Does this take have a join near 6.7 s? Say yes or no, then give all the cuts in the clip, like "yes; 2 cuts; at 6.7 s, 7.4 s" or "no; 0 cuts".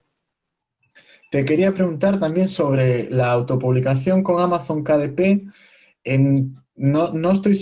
no; 0 cuts